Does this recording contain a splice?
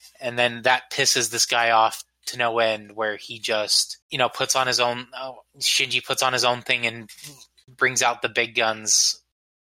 yes; 1 cut; at 4.0 s

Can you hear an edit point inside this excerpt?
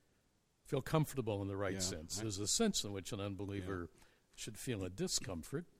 yes; 1 cut; at 2.2 s

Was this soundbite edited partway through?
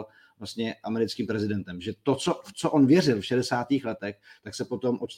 no; 0 cuts

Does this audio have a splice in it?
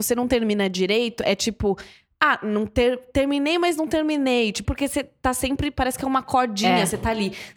yes; 1 cut; at 4.6 s

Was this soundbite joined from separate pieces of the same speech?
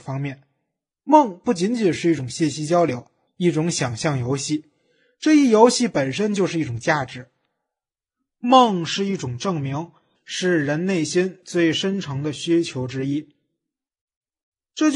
yes; 2 cuts; at 3.3 s, 10.2 s

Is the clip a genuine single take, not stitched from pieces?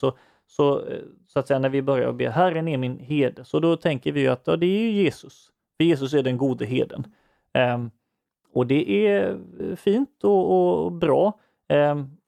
yes; 0 cuts

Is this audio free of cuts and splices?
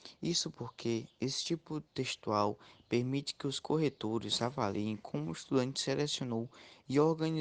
yes; 0 cuts

